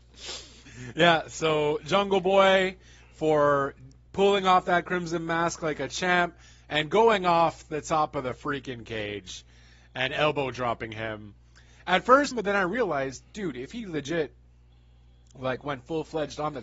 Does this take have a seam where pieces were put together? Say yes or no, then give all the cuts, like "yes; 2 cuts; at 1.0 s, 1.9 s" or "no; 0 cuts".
yes; 1 cut; at 12.3 s